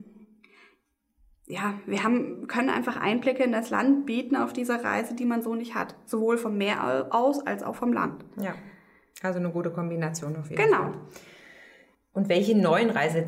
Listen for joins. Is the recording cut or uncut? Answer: uncut